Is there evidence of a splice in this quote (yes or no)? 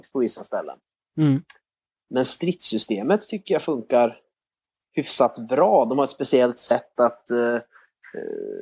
yes